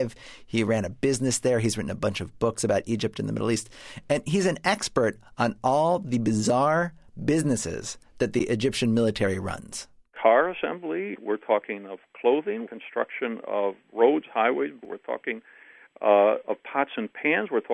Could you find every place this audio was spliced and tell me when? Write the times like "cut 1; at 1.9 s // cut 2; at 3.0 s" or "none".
cut 1; at 12.6 s // cut 2; at 14.8 s